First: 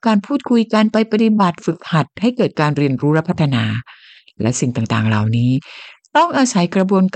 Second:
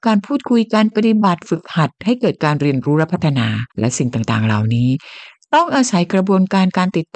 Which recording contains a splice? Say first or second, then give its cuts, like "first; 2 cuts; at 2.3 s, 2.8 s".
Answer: second; 2 cuts; at 0.9 s, 3.7 s